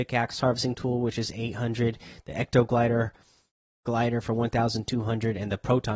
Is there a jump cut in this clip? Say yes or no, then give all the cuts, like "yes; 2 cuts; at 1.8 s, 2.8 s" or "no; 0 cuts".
no; 0 cuts